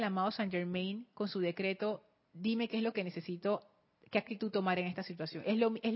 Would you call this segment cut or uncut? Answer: uncut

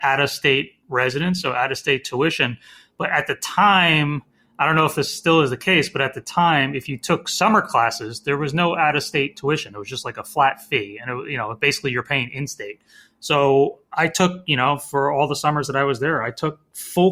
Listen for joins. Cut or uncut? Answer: uncut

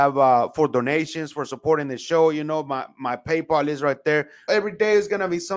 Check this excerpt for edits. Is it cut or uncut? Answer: cut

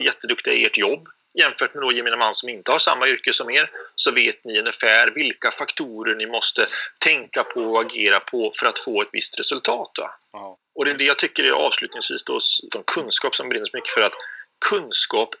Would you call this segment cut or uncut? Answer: cut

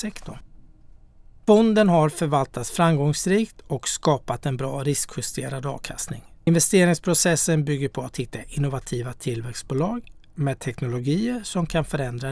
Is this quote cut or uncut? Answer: uncut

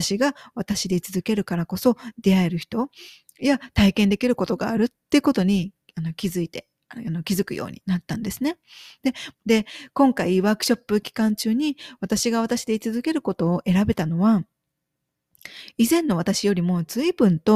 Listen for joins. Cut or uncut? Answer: cut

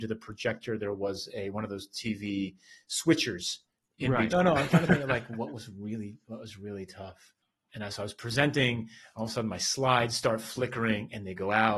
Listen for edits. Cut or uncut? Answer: cut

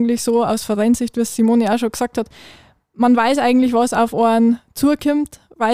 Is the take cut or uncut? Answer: uncut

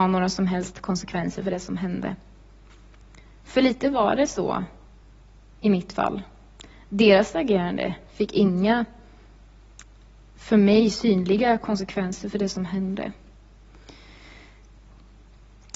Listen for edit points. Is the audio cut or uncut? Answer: uncut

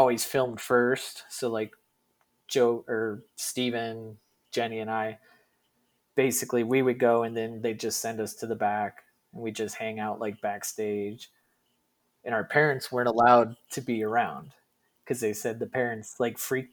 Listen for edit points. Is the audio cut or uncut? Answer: uncut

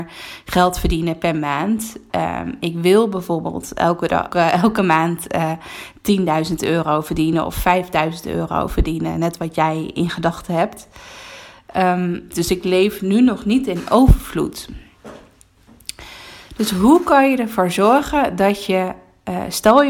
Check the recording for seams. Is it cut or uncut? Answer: cut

